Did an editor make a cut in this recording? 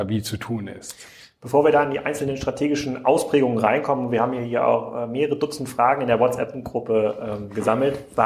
no; 0 cuts

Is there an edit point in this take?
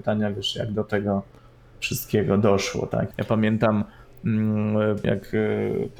yes; 2 cuts; at 3.1 s, 5.0 s

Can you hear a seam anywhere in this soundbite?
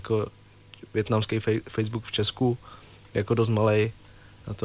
no; 0 cuts

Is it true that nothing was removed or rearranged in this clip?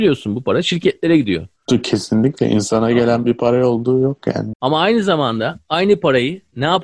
no; 1 cut; at 4.5 s

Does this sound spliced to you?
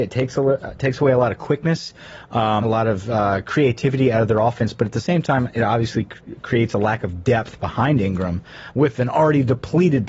yes; 1 cut; at 2.6 s

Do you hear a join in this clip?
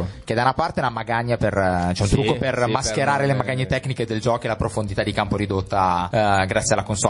yes; 1 cut; at 6.1 s

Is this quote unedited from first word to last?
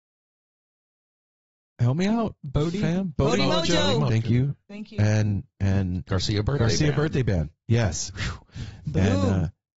yes; 0 cuts

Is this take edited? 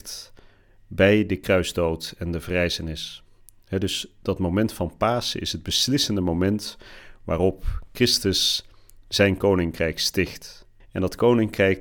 yes; 1 cut; at 10.8 s

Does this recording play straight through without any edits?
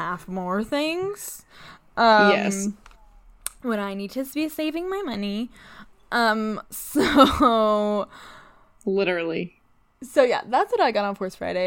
yes; 0 cuts

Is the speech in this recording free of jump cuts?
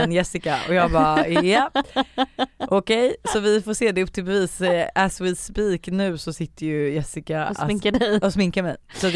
yes; 0 cuts

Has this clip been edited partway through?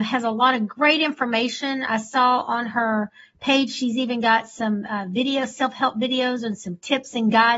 no; 0 cuts

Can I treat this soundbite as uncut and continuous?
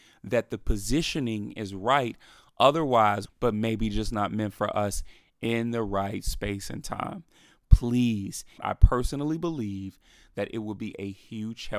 no; 2 cuts; at 3.2 s, 8.6 s

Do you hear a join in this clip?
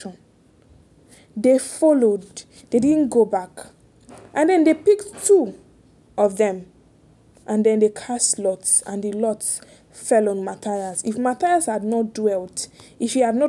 no; 0 cuts

